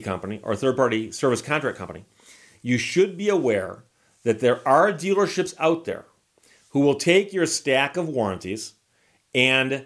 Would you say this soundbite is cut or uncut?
uncut